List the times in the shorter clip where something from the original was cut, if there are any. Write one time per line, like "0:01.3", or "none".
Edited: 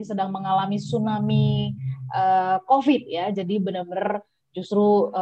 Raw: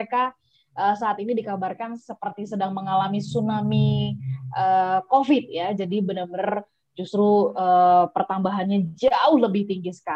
none